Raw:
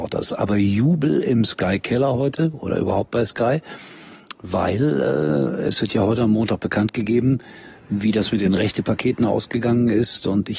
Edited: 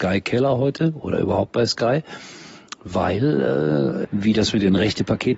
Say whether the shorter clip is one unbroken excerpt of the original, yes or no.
no